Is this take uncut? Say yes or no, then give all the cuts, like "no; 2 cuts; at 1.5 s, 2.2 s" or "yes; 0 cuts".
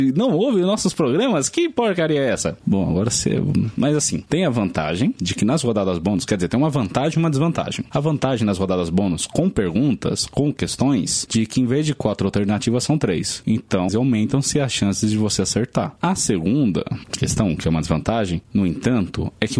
no; 2 cuts; at 13.9 s, 16.0 s